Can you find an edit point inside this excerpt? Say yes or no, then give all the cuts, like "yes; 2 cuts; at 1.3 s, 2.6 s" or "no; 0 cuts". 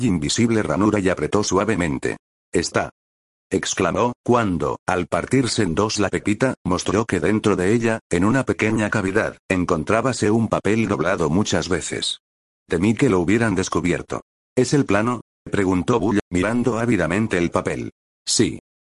yes; 1 cut; at 15.3 s